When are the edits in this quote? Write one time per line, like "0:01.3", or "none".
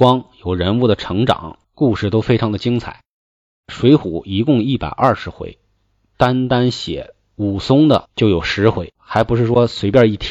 0:01.6
0:08.9